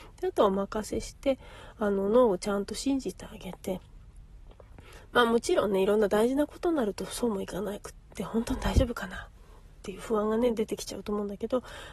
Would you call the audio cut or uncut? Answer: uncut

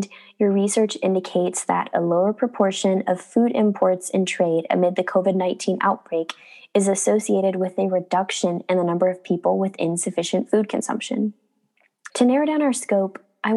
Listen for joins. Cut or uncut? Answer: cut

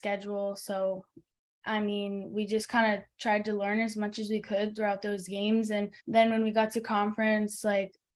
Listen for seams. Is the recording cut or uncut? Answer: cut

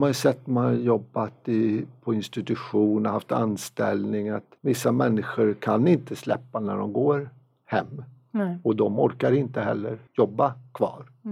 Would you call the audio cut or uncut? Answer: cut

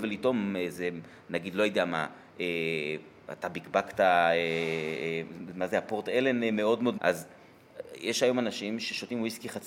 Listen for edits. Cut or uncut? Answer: cut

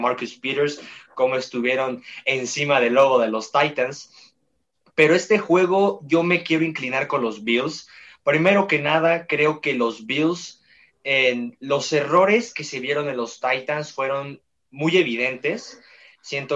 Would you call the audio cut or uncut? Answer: uncut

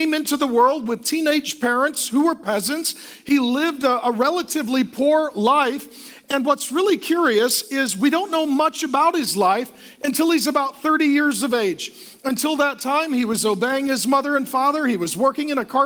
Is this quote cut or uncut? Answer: uncut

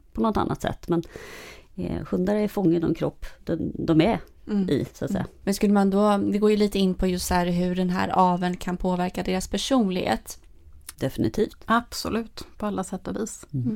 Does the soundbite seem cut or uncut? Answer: cut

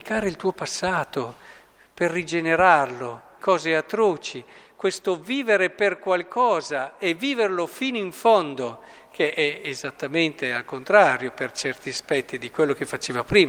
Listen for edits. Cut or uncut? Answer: cut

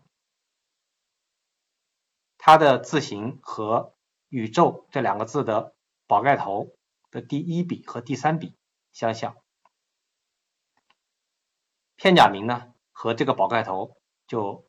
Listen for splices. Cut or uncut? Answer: uncut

